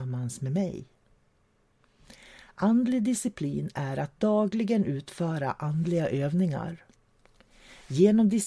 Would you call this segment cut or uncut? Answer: uncut